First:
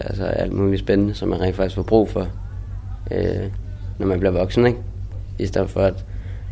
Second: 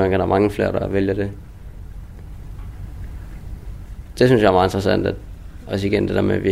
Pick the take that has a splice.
second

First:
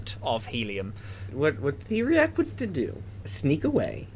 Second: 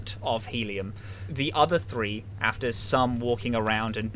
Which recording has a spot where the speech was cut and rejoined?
first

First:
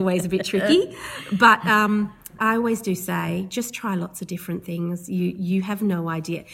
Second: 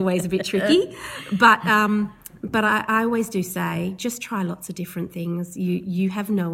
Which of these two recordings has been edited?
first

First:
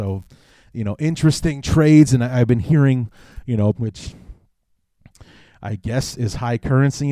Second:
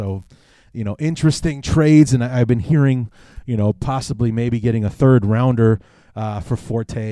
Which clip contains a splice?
first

